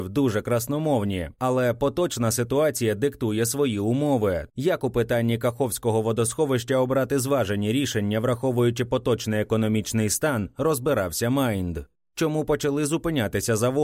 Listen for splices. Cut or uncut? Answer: cut